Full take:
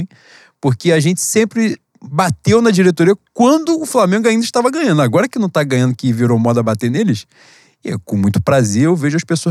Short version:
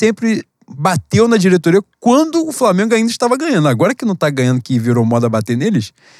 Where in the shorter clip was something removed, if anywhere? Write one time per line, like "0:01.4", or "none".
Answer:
none

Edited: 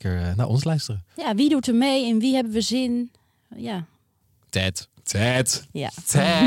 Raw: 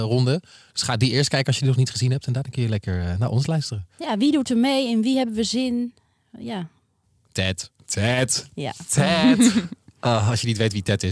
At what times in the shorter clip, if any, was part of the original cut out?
none

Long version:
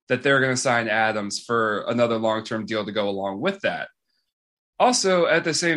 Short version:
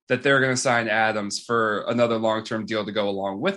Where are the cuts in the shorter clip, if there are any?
none

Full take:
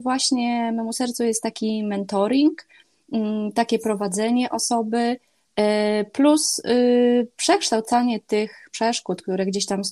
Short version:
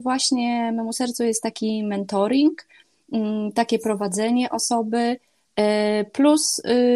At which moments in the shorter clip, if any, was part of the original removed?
none

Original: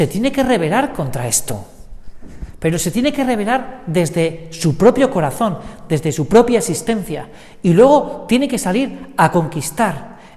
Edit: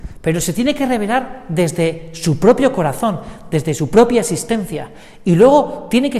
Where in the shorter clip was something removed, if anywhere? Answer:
none

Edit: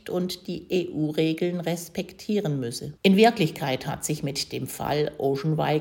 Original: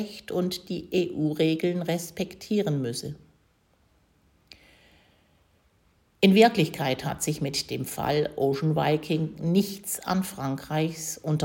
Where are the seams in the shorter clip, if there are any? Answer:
0:03.0

